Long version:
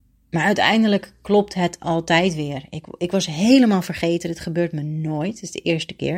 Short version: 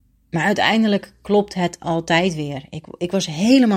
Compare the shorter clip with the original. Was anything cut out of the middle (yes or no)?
no